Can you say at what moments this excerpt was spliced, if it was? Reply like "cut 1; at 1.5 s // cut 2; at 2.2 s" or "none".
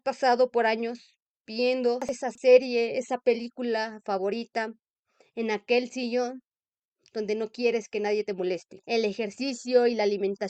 cut 1; at 8.8 s